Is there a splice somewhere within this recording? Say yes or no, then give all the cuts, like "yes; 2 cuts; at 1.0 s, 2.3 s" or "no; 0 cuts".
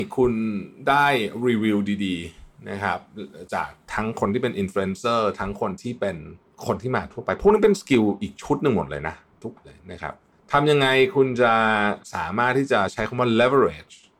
yes; 1 cut; at 9.6 s